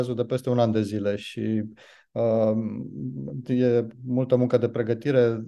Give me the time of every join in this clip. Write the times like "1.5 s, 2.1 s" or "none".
3.4 s